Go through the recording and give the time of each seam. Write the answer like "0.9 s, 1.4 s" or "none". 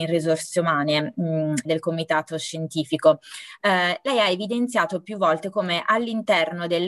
1.6 s